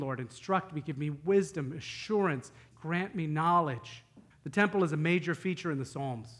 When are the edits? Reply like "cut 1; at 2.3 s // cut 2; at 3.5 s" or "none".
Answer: cut 1; at 2.7 s // cut 2; at 4.3 s